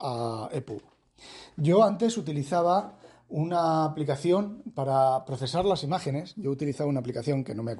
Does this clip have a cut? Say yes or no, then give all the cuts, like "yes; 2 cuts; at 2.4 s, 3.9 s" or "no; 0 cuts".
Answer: no; 0 cuts